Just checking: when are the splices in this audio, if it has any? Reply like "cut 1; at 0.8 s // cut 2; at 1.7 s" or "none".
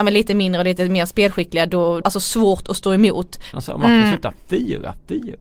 cut 1; at 2.0 s // cut 2; at 3.5 s